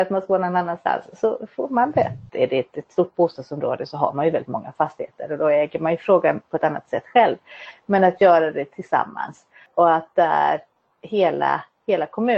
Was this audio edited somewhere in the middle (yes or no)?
yes